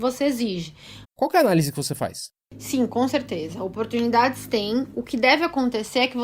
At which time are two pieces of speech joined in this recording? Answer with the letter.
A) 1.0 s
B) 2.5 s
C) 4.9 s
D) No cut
A